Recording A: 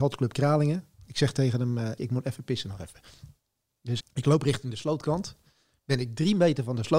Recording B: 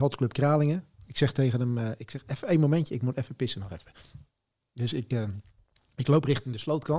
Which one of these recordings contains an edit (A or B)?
A